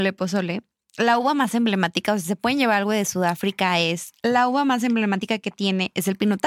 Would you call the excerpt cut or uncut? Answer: uncut